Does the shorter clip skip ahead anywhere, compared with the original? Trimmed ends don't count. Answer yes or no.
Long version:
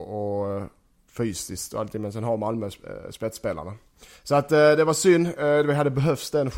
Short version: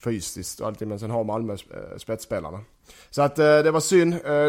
no